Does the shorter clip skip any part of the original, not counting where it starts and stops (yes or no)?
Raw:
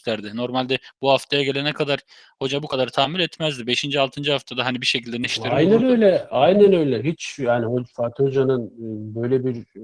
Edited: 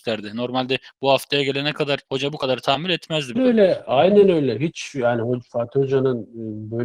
yes